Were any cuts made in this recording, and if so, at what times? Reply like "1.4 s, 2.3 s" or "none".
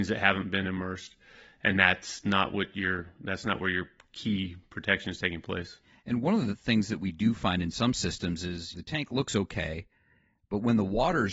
8.7 s